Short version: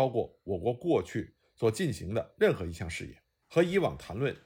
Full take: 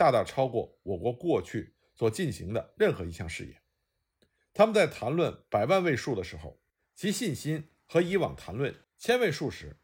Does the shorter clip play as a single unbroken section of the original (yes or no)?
no